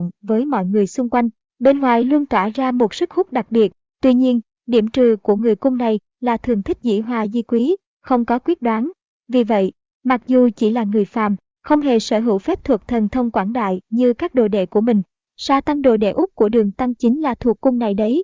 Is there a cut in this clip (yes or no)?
yes